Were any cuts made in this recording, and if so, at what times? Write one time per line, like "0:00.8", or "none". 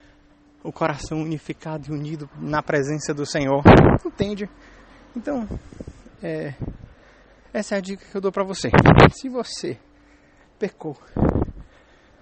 0:02.3

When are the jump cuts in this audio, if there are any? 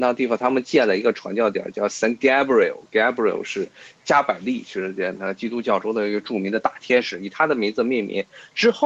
none

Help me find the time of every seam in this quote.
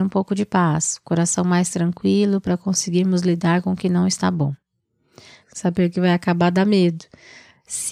0:05.4

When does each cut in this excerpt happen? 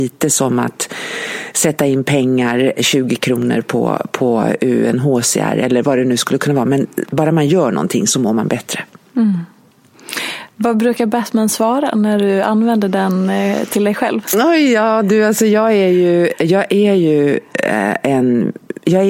0:02.8

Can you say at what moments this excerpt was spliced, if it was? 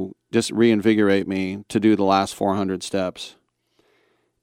none

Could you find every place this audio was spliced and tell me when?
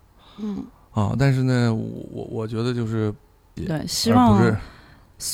0:03.6

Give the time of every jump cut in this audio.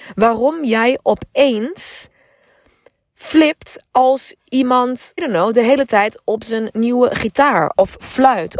0:05.2

